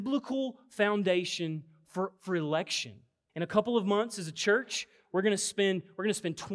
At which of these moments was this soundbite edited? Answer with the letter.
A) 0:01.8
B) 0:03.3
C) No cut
B